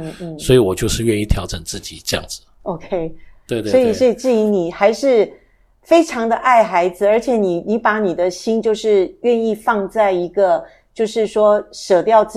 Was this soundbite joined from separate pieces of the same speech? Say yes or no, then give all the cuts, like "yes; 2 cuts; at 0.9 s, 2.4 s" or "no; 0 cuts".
no; 0 cuts